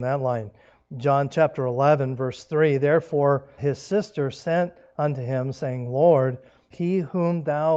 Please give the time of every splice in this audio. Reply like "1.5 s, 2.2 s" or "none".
3.6 s, 6.7 s